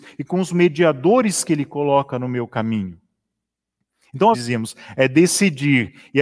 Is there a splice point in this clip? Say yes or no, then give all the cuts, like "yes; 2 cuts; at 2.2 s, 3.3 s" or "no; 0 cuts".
yes; 1 cut; at 4.3 s